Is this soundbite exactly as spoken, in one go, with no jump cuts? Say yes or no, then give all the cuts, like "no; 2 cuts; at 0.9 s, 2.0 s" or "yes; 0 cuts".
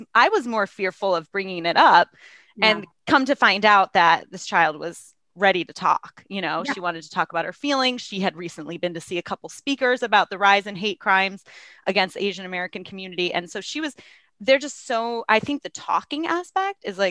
yes; 0 cuts